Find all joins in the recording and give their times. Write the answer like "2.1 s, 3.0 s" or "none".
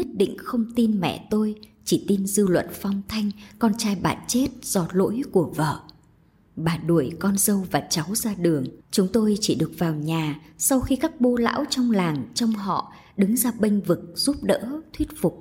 8.8 s